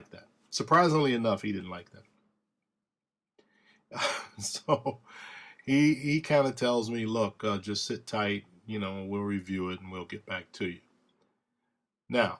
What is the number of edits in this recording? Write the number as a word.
zero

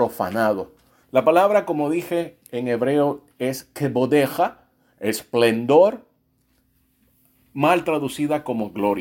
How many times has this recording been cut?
one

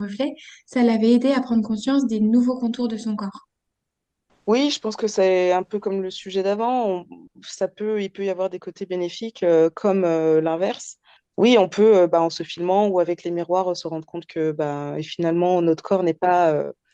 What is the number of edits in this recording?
zero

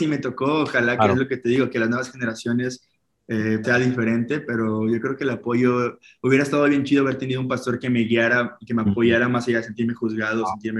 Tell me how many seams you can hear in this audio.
one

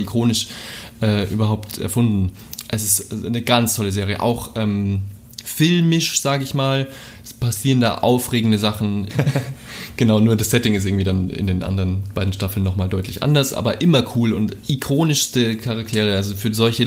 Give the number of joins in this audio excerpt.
one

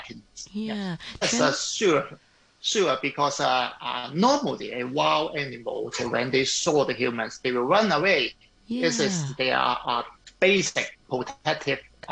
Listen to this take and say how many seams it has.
one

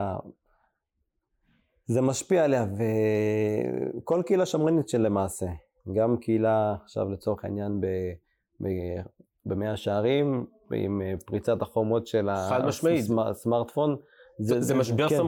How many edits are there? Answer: one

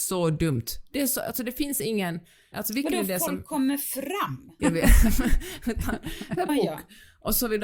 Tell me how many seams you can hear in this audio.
three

